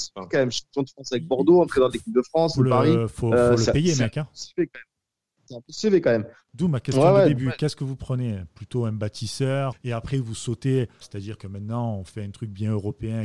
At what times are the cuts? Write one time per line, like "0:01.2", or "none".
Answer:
0:06.5
0:09.7
0:11.0